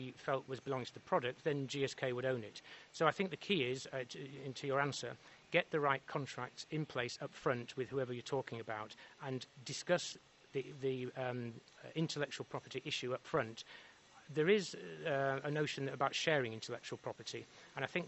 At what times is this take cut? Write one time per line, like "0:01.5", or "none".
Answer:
none